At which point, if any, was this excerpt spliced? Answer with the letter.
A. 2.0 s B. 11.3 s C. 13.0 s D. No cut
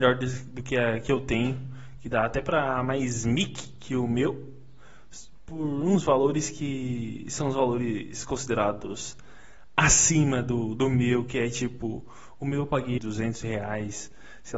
C